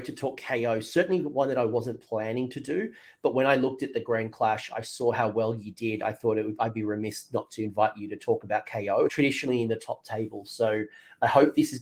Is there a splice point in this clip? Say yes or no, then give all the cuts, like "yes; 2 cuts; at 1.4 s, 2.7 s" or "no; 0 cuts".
yes; 1 cut; at 9.1 s